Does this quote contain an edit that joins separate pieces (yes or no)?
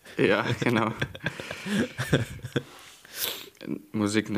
no